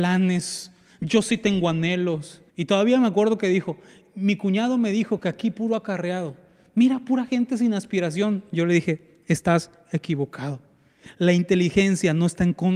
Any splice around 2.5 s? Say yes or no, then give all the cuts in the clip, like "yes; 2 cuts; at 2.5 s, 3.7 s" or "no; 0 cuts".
yes; 1 cut; at 2.5 s